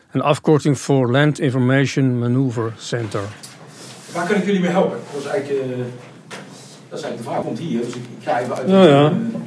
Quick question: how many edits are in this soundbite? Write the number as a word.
one